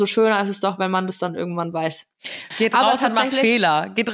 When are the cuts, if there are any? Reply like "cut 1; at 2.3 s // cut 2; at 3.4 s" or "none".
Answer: cut 1; at 2.5 s